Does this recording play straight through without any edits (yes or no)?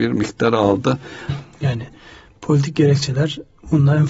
no